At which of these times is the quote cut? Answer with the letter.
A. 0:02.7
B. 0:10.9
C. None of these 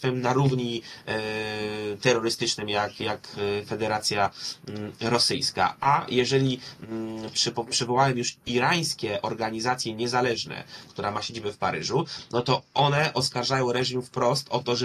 B